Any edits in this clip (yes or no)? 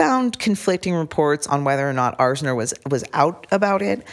no